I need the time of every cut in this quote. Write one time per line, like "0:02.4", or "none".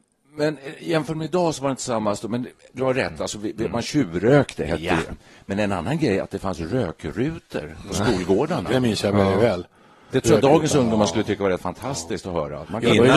none

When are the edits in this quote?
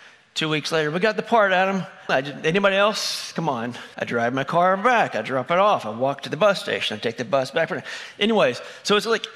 0:02.1
0:03.9

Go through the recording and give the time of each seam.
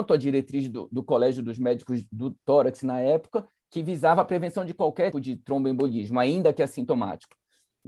0:05.1

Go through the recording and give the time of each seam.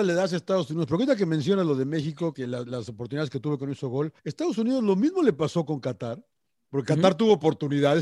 0:02.3
0:04.2

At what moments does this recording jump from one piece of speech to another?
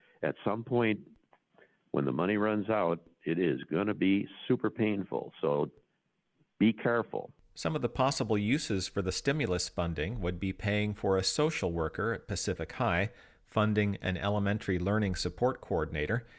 none

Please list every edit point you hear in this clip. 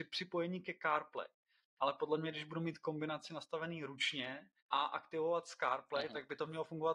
0:01.7
0:04.6

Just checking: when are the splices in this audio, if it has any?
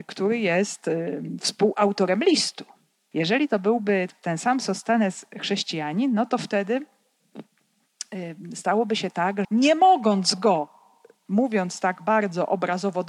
0:03.1
0:09.4

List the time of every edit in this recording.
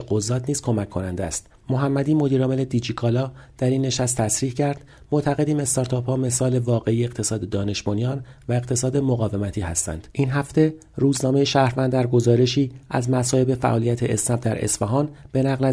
0:10.1

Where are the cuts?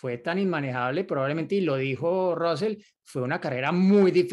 none

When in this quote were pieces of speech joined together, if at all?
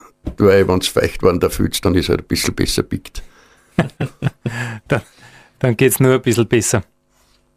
none

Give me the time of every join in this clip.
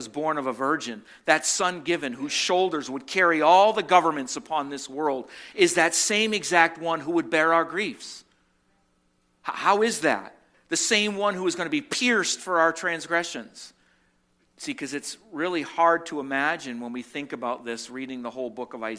0:10.5
0:14.4

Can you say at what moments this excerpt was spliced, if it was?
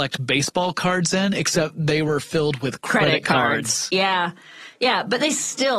none

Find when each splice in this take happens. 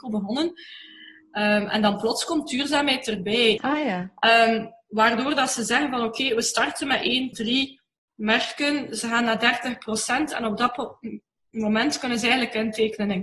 0:03.6
0:07.3

